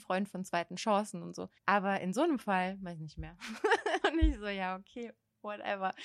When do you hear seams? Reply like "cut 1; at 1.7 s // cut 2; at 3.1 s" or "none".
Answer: cut 1; at 1.6 s // cut 2; at 4.0 s